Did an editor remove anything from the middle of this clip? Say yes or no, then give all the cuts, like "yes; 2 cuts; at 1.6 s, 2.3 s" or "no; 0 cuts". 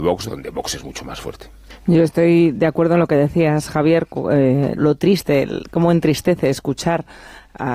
yes; 1 cut; at 4.8 s